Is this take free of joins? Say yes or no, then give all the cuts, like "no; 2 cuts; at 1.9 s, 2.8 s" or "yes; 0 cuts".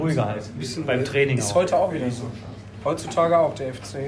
yes; 0 cuts